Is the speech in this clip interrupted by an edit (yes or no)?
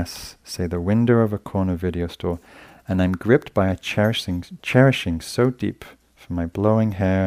no